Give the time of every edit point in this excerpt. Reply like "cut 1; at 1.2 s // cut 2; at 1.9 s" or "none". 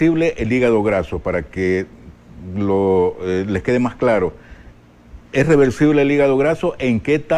none